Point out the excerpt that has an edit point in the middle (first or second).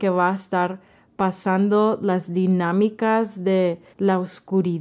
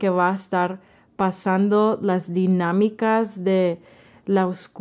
first